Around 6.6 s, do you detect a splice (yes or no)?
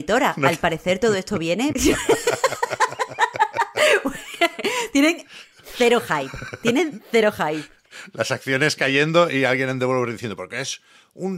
no